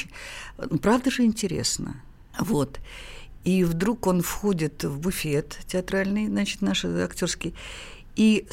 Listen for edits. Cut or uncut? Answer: cut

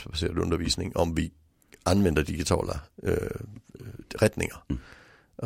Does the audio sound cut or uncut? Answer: uncut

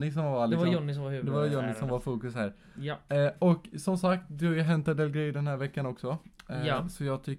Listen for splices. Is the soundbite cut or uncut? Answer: uncut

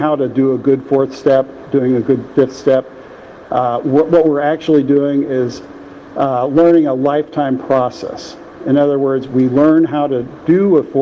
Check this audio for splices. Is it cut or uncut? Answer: uncut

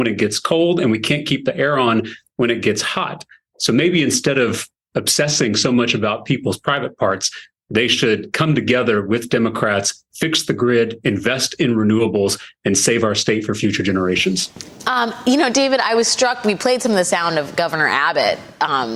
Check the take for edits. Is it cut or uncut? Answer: uncut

